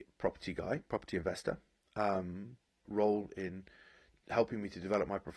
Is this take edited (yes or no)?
yes